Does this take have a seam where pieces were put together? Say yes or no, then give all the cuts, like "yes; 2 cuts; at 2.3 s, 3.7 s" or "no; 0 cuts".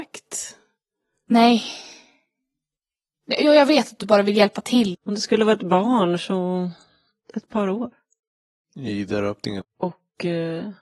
yes; 2 cuts; at 4.9 s, 9.6 s